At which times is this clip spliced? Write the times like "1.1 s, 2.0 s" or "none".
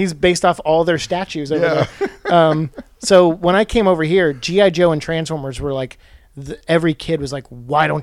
none